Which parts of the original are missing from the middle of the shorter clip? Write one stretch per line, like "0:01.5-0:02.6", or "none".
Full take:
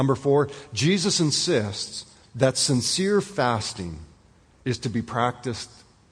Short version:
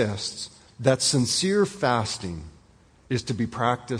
none